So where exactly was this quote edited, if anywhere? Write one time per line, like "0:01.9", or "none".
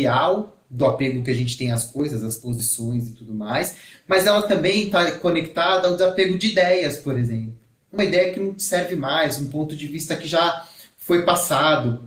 none